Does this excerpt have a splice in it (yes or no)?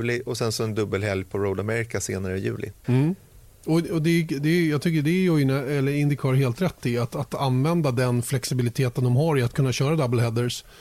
yes